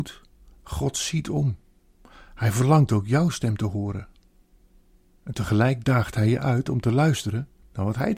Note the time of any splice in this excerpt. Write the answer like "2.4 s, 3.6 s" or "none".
none

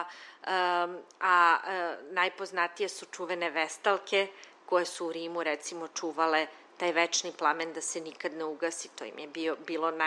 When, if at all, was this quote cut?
none

